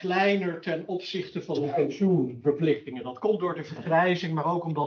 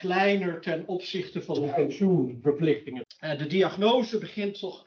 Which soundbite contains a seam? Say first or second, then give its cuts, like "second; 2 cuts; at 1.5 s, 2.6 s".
second; 1 cut; at 3.0 s